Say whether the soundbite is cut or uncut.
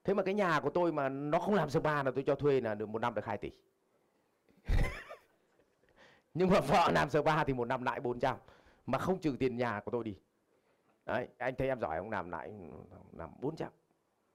cut